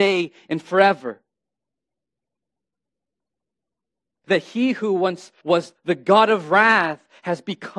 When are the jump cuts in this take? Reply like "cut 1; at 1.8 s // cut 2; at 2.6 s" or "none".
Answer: cut 1; at 4.2 s // cut 2; at 5.4 s